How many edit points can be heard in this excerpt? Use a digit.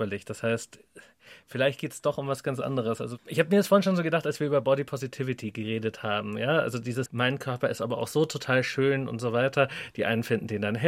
1